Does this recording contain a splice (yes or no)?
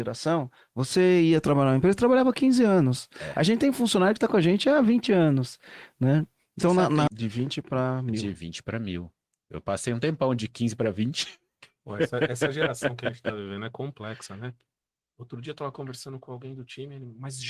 yes